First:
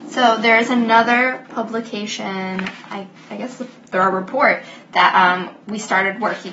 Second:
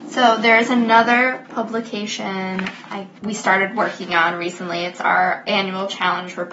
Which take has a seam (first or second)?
second